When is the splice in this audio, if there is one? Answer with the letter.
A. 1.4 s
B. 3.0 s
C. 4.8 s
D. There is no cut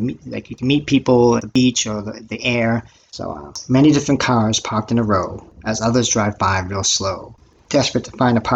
A